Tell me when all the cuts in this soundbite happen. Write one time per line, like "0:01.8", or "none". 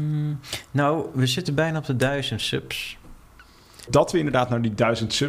0:03.9